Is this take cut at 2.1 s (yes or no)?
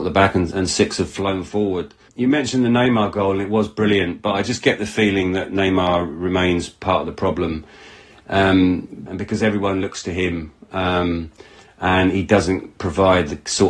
no